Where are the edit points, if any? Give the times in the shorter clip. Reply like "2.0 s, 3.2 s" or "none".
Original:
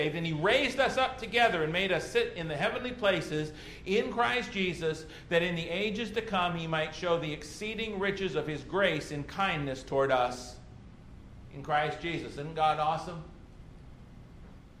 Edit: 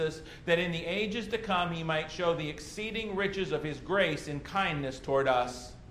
none